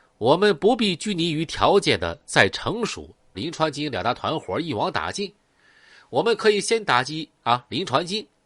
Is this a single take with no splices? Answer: no; 1 cut; at 3.3 s

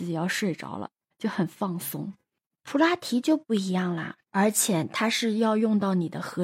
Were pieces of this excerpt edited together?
yes; 2 cuts; at 1.1 s, 4.2 s

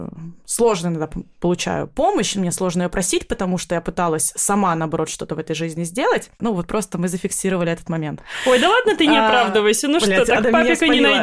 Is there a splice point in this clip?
yes; 1 cut; at 6.4 s

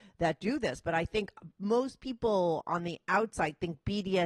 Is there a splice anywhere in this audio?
no; 0 cuts

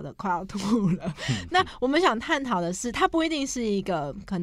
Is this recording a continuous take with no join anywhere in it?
yes; 0 cuts

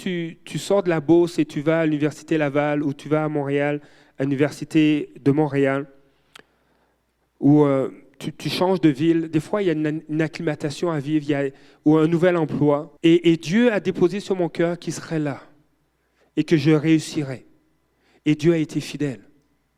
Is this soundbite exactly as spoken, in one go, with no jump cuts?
no; 1 cut; at 13.0 s

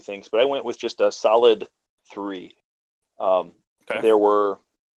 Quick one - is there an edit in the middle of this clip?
no; 0 cuts

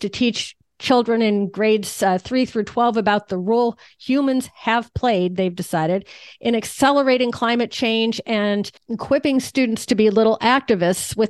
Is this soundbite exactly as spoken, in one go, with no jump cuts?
no; 1 cut; at 8.8 s

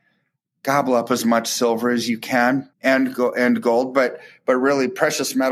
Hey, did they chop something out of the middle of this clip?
yes; 1 cut; at 2.7 s

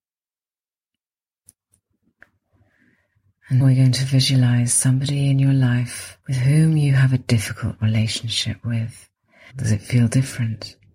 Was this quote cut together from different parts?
yes; 3 cuts; at 3.6 s, 6.2 s, 9.5 s

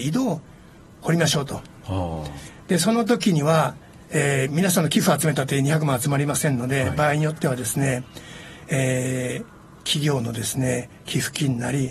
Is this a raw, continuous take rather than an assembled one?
yes; 0 cuts

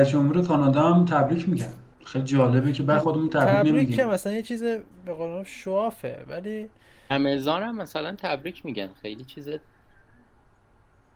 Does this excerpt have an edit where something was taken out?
yes; 1 cut; at 3.0 s

